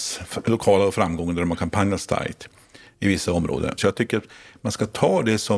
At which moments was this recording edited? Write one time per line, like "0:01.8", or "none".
0:03.8